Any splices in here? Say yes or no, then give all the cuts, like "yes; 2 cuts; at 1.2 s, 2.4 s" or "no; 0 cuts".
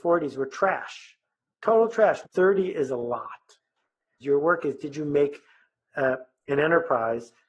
yes; 2 cuts; at 2.2 s, 4.2 s